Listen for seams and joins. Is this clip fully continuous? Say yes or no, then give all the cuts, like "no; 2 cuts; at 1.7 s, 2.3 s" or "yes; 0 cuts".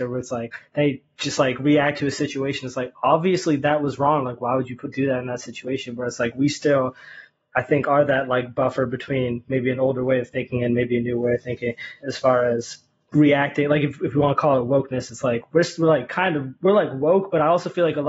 yes; 0 cuts